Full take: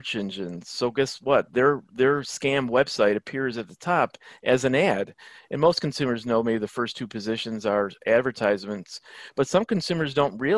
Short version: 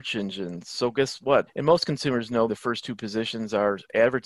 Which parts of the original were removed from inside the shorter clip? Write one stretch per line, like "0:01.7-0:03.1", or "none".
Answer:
0:01.5-0:05.4
0:06.4-0:06.6